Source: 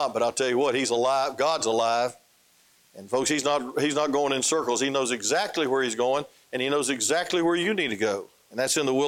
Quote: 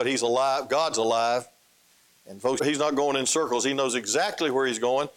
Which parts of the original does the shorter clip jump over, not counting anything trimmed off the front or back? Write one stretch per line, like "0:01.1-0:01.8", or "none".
0:03.2-0:03.7